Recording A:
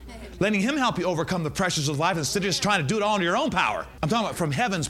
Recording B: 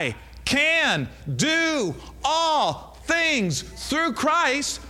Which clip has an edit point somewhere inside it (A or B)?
A